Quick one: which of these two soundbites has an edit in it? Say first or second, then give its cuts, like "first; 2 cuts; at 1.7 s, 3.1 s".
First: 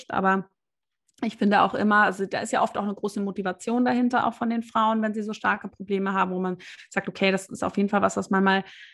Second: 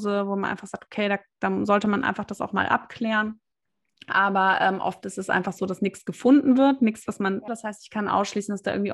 second; 1 cut; at 7.5 s